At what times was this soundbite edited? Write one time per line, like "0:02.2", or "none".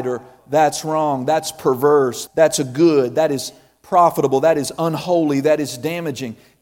0:02.3